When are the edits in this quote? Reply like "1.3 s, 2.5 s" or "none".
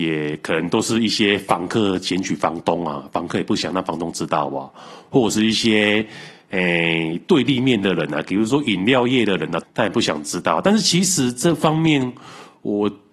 9.6 s